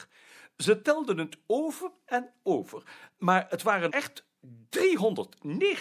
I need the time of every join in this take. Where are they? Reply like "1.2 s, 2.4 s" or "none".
3.9 s